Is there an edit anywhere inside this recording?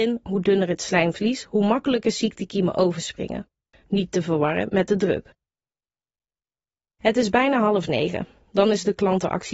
yes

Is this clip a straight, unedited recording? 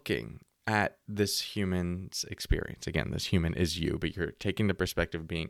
yes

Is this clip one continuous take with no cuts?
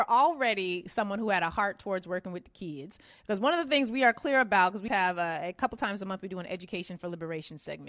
no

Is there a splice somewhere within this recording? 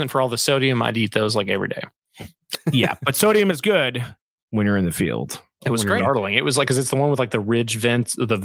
yes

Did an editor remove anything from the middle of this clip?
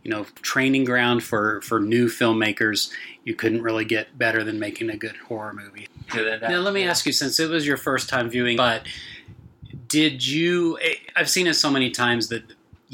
yes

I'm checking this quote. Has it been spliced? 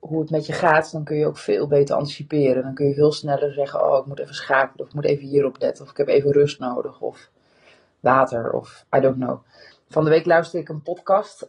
yes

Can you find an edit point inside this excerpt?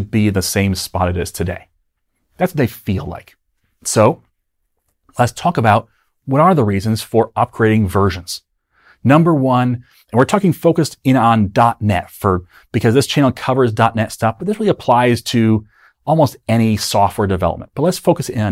no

